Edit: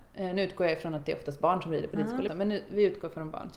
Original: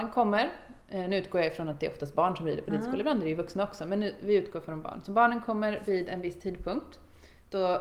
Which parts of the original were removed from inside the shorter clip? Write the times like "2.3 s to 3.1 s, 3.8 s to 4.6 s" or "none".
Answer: 3.0 s to 3.8 s